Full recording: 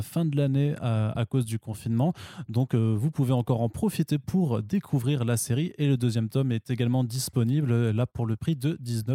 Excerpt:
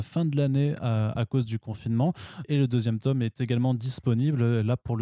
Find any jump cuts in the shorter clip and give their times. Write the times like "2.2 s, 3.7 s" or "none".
2.4 s